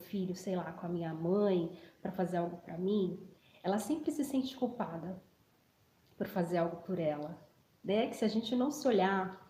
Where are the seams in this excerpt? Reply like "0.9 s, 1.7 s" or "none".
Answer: 7.7 s